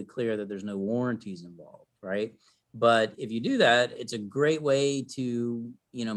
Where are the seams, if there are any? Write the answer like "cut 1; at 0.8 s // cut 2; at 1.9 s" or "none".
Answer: none